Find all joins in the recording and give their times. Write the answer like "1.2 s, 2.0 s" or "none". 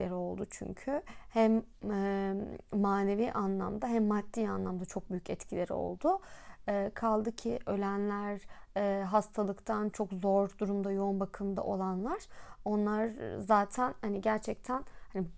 9.9 s